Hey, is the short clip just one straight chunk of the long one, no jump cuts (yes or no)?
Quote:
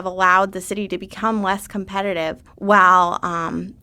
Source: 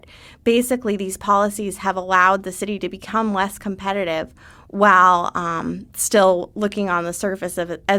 no